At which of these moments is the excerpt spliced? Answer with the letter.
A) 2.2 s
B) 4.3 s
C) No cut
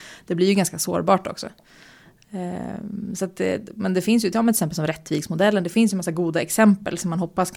C